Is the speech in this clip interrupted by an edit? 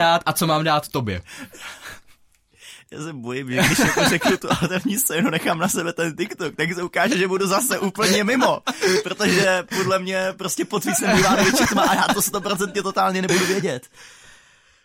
no; 0 cuts

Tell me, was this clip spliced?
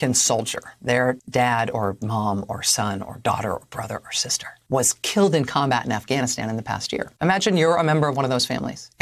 no; 0 cuts

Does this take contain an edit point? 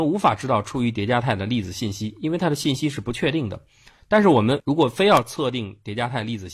no; 0 cuts

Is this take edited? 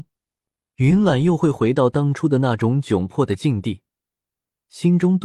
no; 0 cuts

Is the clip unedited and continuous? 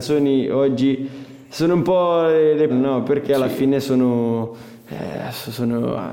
no; 1 cut; at 2.7 s

